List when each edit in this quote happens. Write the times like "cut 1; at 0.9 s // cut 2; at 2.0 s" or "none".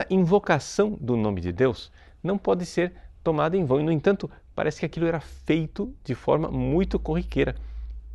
none

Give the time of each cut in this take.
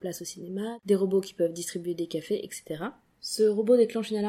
cut 1; at 3.1 s

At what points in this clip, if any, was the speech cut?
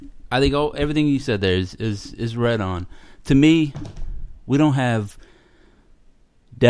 none

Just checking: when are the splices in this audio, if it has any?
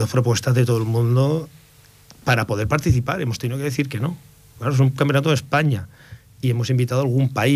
none

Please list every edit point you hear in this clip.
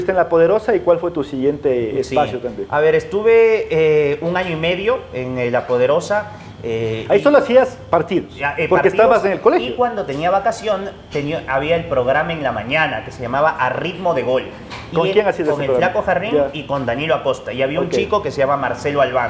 none

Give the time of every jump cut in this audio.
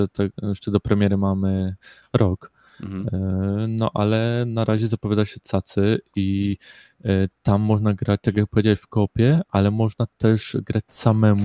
none

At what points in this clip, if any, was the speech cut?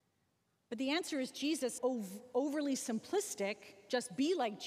cut 1; at 1.8 s

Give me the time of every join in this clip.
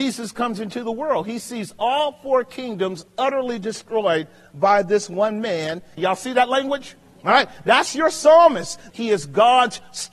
cut 1; at 6.0 s // cut 2; at 8.9 s

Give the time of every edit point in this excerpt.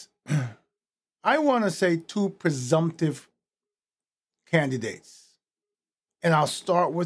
none

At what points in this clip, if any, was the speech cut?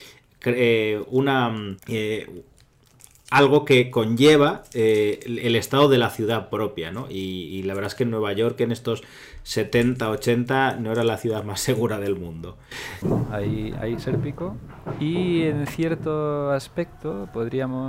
cut 1; at 1.8 s // cut 2; at 13.0 s

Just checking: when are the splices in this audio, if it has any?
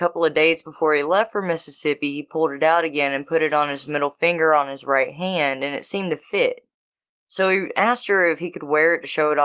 none

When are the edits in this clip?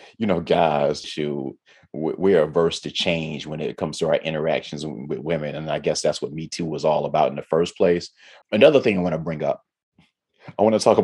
cut 1; at 1.0 s // cut 2; at 8.4 s

